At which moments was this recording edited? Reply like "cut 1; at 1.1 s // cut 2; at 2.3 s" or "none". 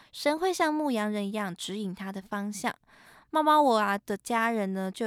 none